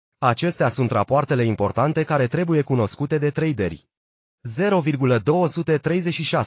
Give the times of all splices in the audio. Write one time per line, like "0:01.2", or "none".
0:04.4